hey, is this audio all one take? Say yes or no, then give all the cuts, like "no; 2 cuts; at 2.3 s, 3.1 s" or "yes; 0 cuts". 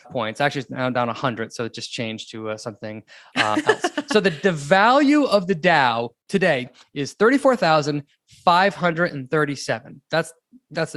yes; 0 cuts